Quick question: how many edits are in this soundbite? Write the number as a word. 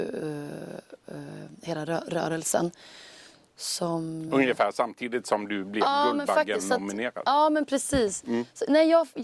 zero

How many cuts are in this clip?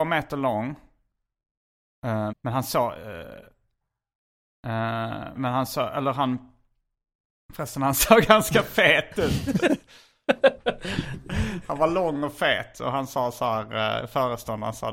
two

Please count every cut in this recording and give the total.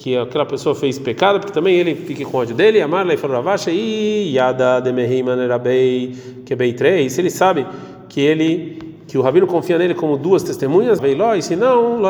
one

